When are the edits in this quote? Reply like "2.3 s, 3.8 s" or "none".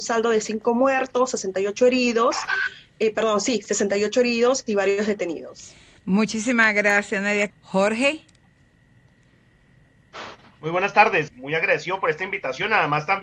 7.5 s, 11.3 s